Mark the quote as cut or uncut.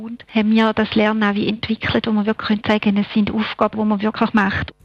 cut